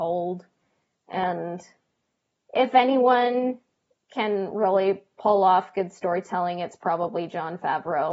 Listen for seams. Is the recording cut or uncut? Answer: uncut